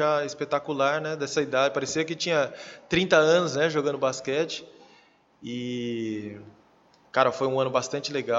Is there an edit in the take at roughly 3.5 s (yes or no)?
no